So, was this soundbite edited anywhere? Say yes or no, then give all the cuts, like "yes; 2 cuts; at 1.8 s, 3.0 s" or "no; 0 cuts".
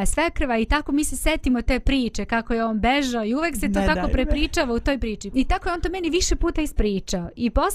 yes; 1 cut; at 5.3 s